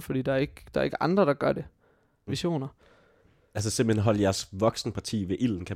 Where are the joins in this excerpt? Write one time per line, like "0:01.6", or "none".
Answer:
0:02.3